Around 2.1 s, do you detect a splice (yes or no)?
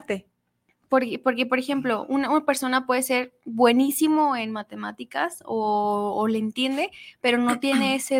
no